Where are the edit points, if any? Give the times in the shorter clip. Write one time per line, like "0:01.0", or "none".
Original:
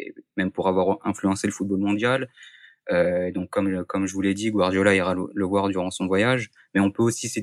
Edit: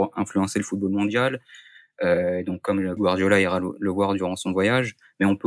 0:03.0